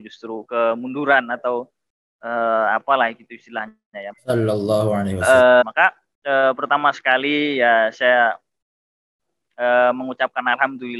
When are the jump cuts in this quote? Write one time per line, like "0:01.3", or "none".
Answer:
0:04.1
0:05.6